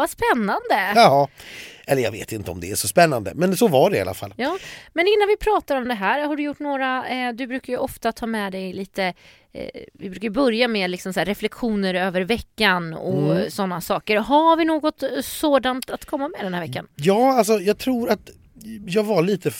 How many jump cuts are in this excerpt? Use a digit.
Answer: 0